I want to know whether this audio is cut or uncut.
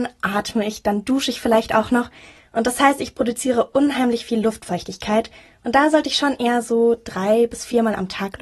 uncut